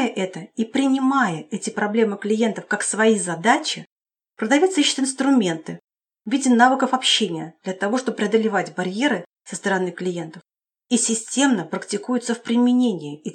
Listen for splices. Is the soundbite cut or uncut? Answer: uncut